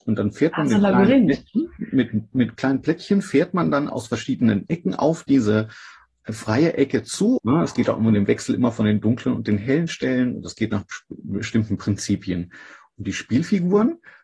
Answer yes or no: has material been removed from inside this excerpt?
yes